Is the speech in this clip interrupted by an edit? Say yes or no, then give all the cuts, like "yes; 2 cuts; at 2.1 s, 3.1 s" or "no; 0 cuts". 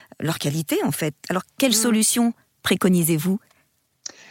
no; 0 cuts